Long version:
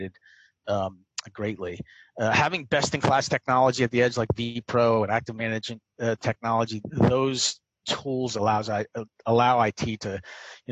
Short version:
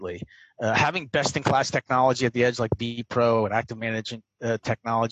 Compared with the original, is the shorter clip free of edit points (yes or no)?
yes